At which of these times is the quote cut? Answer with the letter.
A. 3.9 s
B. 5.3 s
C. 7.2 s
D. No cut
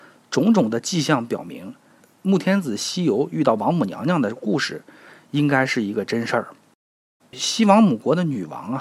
C